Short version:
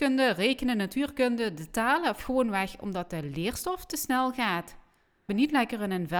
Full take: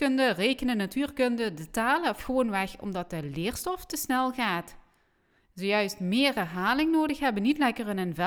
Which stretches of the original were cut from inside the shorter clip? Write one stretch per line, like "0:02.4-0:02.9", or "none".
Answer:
0:05.3-0:07.4